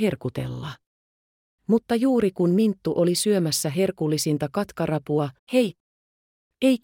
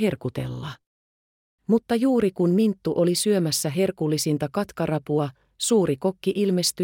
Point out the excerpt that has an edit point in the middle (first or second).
first